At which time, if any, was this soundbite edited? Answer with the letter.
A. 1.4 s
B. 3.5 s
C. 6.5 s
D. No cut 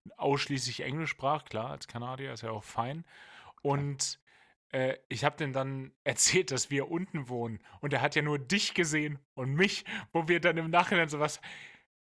D